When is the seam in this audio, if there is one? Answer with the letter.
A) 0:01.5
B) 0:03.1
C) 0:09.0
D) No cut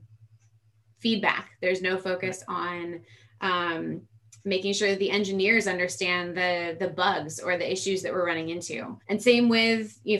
C